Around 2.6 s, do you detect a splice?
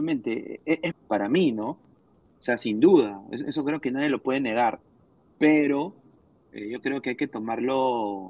no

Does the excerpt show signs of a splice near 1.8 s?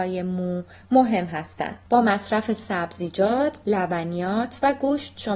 no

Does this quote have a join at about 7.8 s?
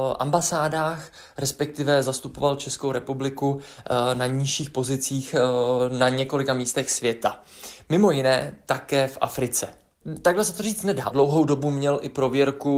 no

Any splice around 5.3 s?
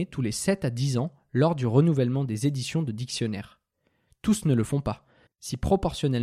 yes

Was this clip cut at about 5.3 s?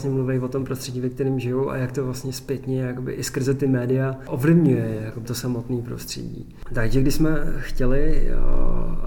yes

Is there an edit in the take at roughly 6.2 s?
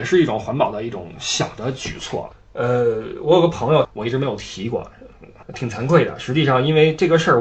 no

